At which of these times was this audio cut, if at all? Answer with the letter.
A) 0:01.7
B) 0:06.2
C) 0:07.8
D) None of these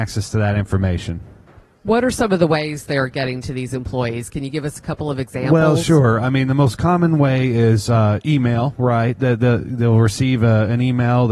D